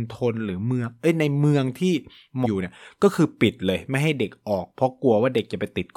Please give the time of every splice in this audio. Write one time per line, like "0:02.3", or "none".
0:02.4